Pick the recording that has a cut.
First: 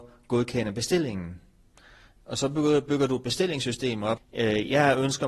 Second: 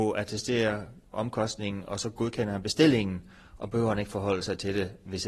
first; 1 cut; at 4.2 s

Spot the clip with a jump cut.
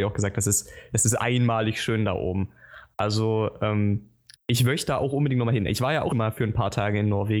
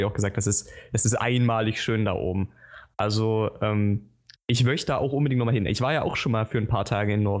first; 1 cut; at 6.1 s

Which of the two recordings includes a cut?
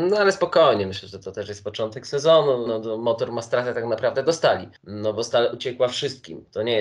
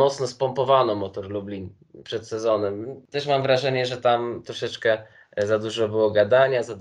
first; 2 cuts; at 2.7 s, 4.8 s

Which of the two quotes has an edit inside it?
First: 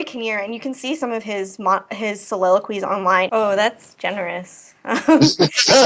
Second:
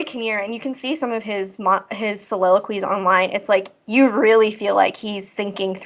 first; 1 cut; at 3.3 s

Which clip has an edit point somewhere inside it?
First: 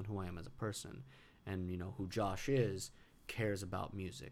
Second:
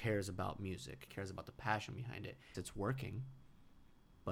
second; 2 cuts; at 1.1 s, 2.5 s

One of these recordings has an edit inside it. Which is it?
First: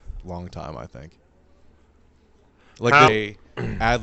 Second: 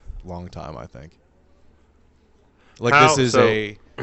first; 1 cut; at 3.1 s

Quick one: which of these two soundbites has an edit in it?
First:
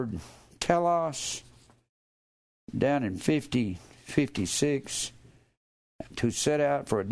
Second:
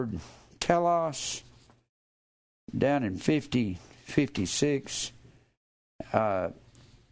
first; 1 cut; at 6.1 s

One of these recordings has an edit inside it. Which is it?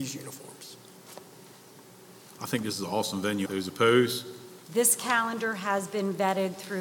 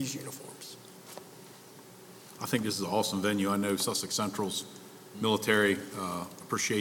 first; 2 cuts; at 3.5 s, 4.6 s

